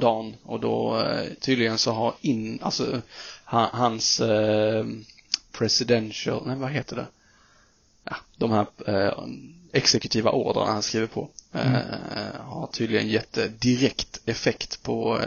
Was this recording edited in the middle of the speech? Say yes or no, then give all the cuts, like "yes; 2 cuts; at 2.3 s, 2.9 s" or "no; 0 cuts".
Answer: no; 0 cuts